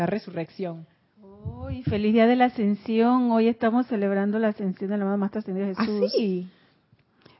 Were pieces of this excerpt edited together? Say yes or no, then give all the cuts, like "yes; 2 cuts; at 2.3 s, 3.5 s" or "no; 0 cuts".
no; 0 cuts